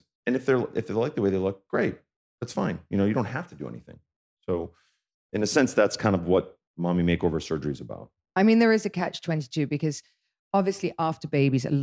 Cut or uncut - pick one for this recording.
uncut